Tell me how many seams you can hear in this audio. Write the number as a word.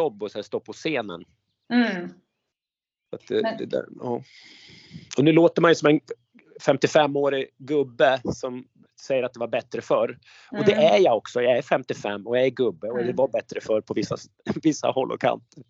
one